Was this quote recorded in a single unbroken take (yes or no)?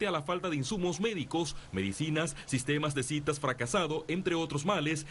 yes